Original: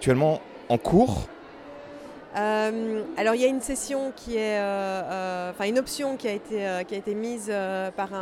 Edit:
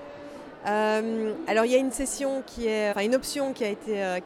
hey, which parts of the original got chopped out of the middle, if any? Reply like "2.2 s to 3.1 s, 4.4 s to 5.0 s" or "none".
4.6 s to 5.5 s